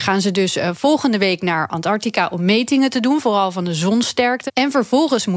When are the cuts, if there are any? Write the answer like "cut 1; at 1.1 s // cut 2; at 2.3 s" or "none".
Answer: cut 1; at 4.5 s